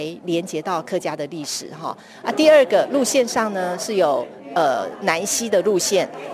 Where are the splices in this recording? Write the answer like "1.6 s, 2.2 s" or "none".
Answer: 2.2 s